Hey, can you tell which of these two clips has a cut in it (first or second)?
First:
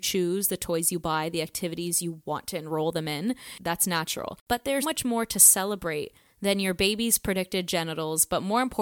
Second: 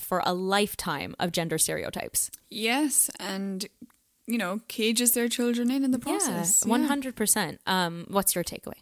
first